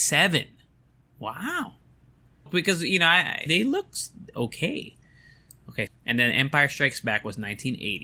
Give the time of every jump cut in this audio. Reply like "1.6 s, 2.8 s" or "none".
2.5 s, 3.5 s, 5.9 s